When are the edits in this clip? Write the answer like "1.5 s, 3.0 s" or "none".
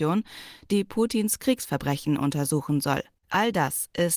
3.2 s